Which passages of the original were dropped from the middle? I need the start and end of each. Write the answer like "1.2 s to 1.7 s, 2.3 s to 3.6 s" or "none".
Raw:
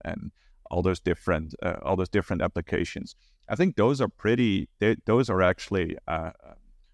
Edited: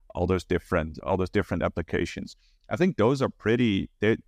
1.6 s to 1.8 s

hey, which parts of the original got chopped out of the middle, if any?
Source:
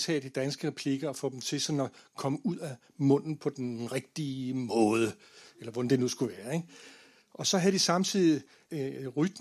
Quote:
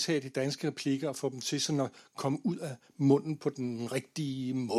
none

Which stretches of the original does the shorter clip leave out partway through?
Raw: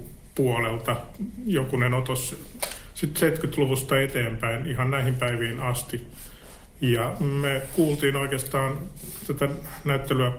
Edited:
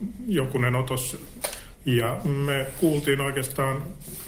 2.9 s to 6.7 s

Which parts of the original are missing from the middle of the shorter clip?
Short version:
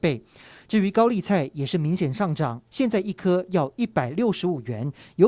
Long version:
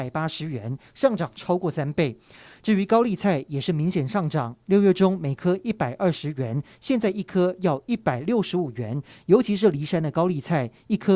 4.6 s to 6.8 s

